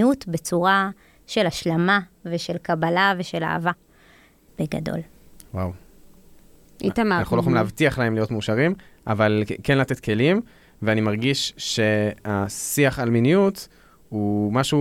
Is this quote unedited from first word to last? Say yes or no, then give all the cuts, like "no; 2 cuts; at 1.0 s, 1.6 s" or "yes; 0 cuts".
no; 2 cuts; at 4.5 s, 7.2 s